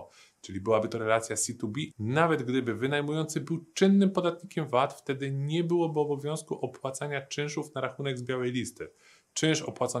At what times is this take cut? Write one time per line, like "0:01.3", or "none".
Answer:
0:01.9